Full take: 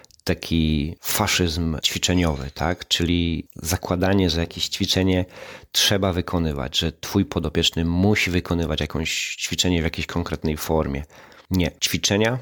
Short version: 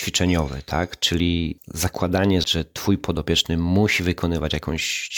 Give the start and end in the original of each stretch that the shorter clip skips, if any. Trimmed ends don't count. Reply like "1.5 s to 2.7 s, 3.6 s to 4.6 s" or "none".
4.3 s to 6.7 s

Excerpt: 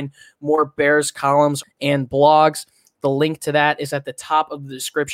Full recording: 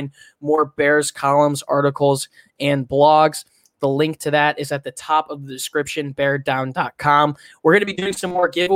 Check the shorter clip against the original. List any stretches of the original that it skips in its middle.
1.6 s to 2.4 s

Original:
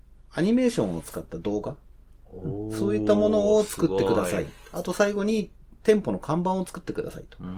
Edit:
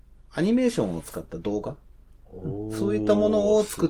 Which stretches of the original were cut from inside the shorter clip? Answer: none

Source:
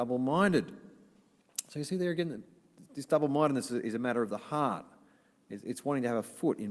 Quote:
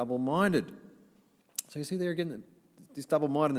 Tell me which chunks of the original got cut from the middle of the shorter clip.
none

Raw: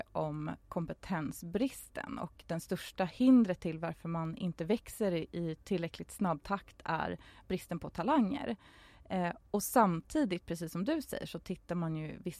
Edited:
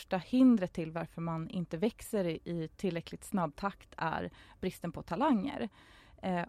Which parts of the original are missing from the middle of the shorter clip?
none

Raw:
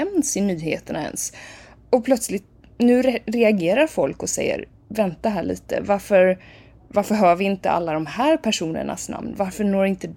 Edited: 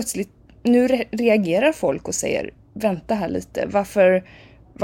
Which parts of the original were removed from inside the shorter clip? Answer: none

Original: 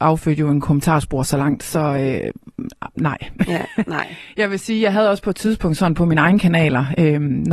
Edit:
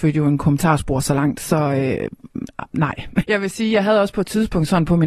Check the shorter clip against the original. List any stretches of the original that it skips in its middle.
3.5 s to 4.3 s

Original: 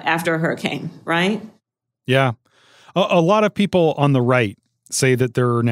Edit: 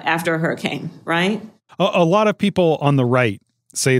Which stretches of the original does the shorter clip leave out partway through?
1.7 s to 2.9 s

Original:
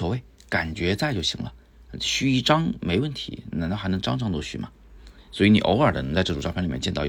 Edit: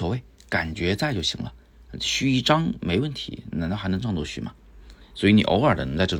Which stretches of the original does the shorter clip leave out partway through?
4.0 s to 4.2 s

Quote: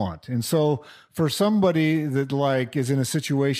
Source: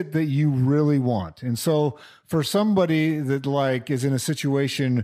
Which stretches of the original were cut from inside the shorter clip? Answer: none

